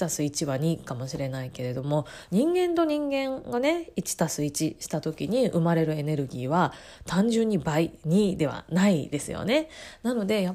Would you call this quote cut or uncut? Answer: uncut